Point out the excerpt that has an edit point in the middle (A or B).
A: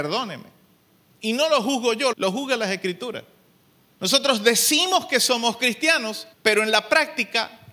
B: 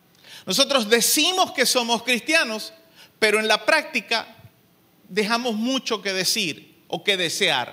A